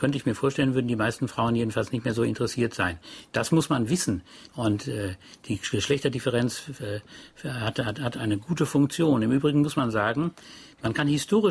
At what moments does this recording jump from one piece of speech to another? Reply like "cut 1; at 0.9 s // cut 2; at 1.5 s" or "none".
cut 1; at 4.5 s

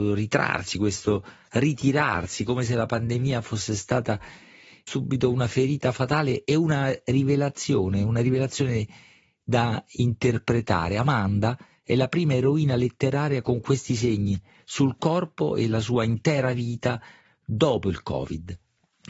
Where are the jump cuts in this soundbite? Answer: none

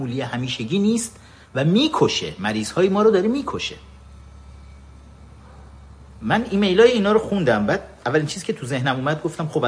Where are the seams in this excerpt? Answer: none

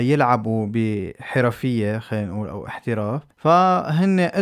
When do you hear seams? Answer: cut 1; at 3.3 s

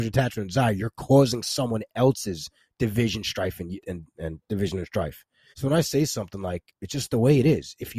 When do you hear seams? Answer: cut 1; at 3.8 s // cut 2; at 5.5 s

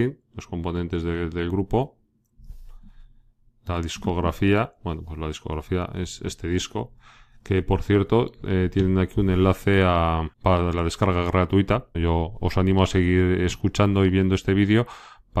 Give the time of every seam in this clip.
cut 1; at 10.3 s // cut 2; at 11.9 s

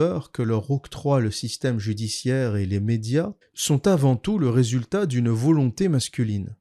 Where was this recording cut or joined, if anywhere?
cut 1; at 3.4 s

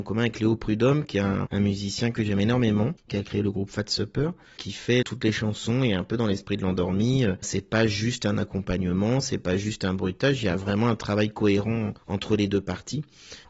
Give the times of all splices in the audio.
cut 1; at 3.1 s

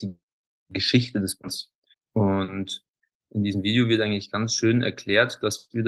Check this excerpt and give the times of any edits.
cut 1; at 1.9 s

